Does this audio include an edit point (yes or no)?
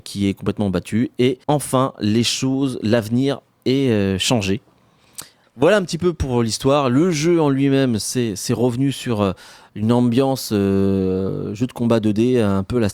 yes